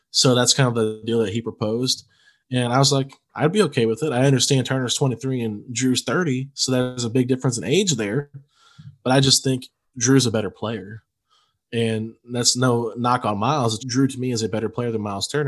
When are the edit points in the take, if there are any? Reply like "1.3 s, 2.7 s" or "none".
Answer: 13.8 s